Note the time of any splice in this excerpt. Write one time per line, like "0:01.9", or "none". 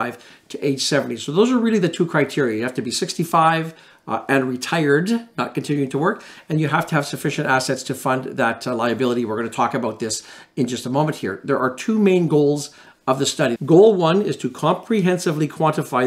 0:13.6